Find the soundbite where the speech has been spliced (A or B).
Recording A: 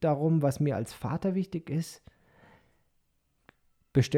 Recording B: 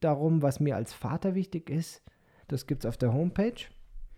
B